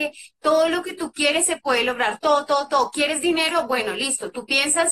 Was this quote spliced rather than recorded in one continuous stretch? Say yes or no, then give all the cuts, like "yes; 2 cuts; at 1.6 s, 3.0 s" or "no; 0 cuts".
no; 0 cuts